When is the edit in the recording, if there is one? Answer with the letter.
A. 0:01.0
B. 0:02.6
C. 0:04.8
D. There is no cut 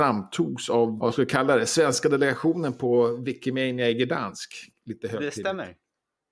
A